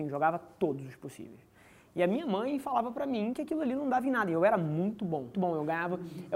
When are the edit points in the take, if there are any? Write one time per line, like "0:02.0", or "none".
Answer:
0:05.3